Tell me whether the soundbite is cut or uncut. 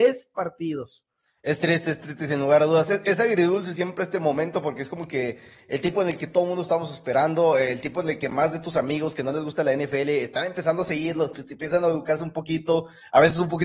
uncut